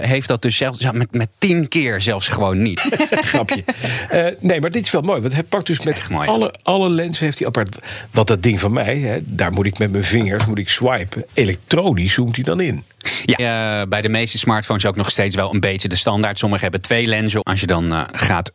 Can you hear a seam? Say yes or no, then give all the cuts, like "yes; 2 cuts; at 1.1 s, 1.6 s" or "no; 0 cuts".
yes; 3 cuts; at 2.8 s, 13.4 s, 17.4 s